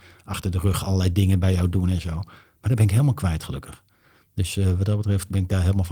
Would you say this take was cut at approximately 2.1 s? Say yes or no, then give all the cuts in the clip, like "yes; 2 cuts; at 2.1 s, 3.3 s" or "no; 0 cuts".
no; 0 cuts